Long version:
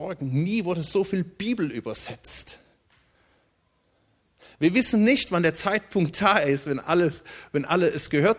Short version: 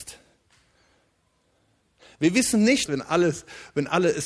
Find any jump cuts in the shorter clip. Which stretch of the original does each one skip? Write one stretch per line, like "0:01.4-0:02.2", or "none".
0:05.3-0:06.6